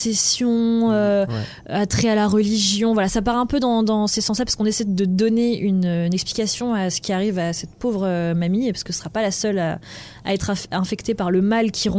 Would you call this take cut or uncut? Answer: uncut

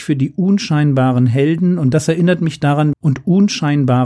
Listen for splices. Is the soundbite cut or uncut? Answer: cut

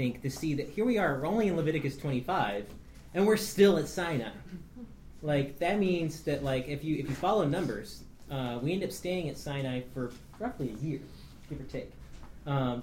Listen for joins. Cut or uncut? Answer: uncut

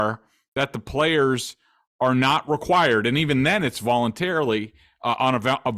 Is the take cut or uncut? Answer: uncut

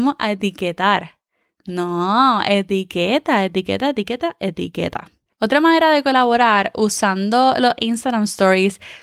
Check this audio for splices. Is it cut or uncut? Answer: uncut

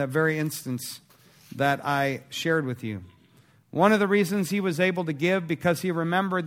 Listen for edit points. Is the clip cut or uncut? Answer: uncut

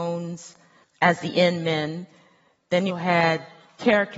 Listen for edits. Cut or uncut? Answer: cut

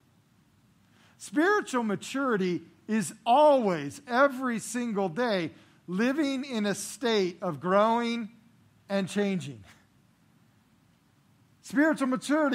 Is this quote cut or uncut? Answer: uncut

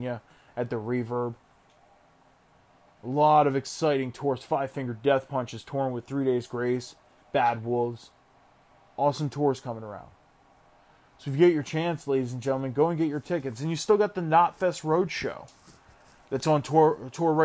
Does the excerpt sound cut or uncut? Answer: uncut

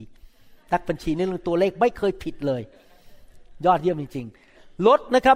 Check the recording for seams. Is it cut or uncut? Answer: uncut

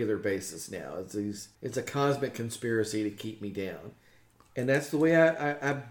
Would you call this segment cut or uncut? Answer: cut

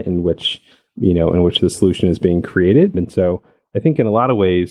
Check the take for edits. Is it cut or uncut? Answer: cut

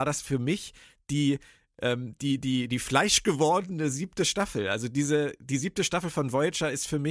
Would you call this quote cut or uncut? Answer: uncut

